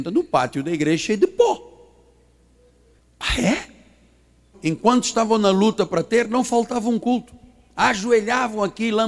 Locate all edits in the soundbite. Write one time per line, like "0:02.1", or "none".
0:04.5